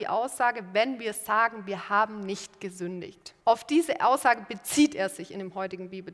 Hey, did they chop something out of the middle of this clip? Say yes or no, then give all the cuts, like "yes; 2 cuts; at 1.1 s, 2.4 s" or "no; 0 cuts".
yes; 1 cut; at 3.4 s